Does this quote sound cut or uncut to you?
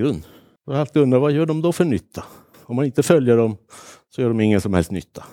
cut